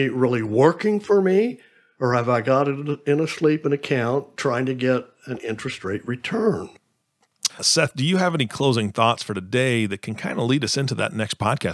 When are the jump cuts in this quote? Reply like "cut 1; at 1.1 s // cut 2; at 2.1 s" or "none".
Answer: cut 1; at 4.4 s // cut 2; at 7.5 s